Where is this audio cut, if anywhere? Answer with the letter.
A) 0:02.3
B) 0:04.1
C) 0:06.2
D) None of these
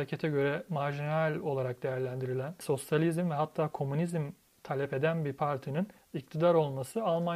D